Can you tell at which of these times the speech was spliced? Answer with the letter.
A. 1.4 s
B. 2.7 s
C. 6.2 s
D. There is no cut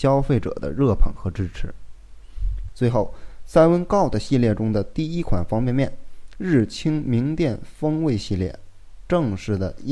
B